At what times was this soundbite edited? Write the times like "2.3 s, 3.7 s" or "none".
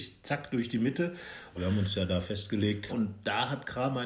1.5 s, 2.9 s